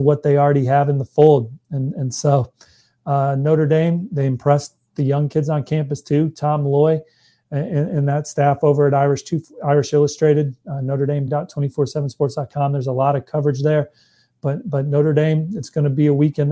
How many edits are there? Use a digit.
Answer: 0